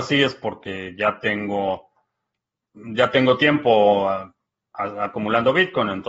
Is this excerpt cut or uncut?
uncut